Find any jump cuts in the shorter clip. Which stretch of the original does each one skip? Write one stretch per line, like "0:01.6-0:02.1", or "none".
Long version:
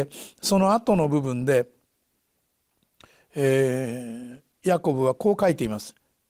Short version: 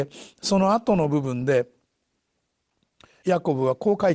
0:03.2-0:04.6